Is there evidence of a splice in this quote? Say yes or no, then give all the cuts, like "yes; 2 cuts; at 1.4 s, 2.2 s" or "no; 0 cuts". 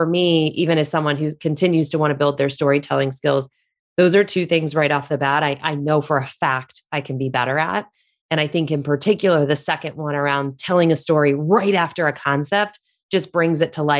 no; 0 cuts